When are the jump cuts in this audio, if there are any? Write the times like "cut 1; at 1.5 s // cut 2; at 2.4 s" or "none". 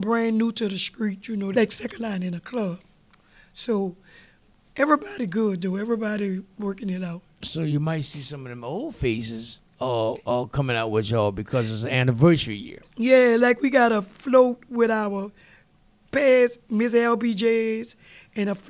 cut 1; at 1.5 s